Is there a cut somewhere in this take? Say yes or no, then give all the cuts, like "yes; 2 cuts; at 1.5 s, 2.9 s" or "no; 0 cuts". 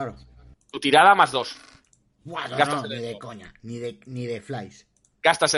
no; 0 cuts